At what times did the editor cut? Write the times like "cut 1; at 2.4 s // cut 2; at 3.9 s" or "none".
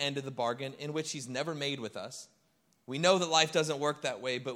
cut 1; at 2.7 s

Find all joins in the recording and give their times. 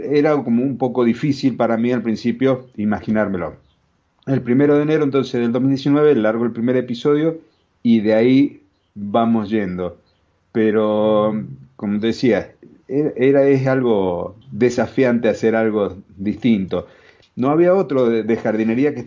cut 1; at 14.4 s // cut 2; at 17.2 s

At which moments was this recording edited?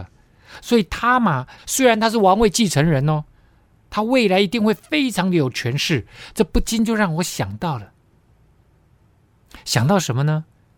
cut 1; at 1.6 s

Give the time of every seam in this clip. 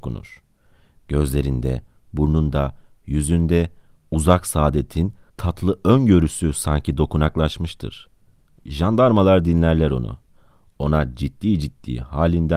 none

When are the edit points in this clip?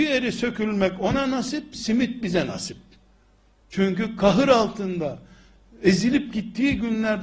cut 1; at 3.6 s

